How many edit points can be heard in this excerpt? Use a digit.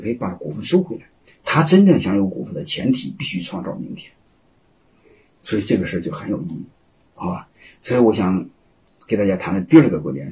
1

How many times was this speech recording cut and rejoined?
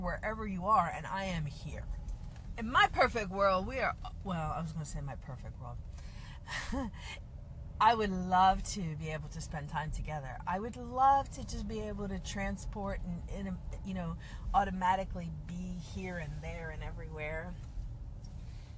1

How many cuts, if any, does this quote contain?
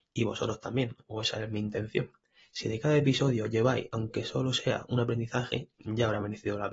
0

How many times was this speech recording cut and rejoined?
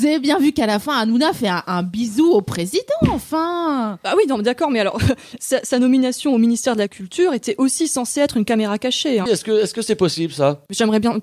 2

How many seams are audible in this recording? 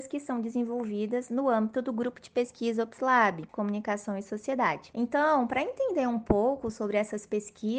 1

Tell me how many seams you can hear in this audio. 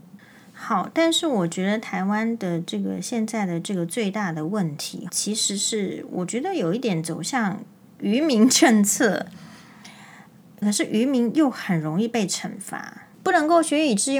3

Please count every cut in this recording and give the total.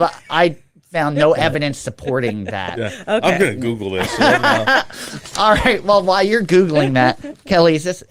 0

